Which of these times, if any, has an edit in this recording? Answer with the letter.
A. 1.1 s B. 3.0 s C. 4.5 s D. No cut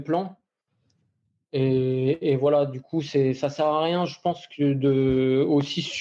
D